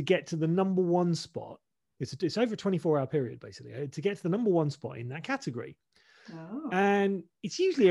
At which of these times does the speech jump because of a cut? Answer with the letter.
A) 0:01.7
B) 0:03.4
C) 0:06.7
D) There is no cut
D